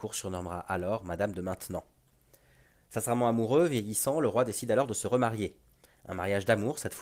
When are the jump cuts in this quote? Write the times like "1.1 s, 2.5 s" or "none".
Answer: none